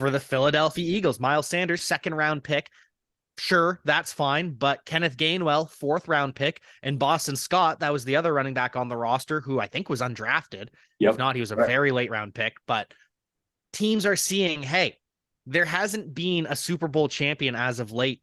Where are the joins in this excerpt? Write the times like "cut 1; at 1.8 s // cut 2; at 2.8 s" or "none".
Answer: none